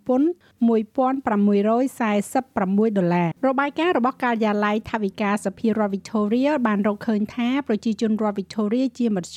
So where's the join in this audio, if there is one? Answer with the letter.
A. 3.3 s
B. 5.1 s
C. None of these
A